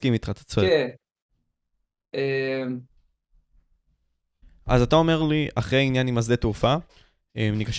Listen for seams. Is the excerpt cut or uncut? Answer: uncut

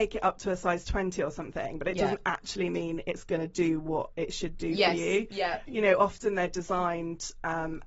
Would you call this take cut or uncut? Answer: uncut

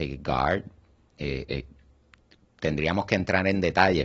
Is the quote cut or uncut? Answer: uncut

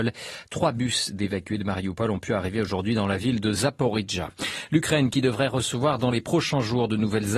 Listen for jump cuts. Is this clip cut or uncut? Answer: uncut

